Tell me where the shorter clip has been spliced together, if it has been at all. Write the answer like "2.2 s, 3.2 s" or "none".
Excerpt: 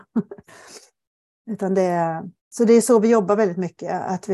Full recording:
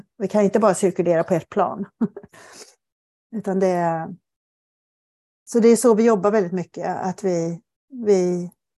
2.4 s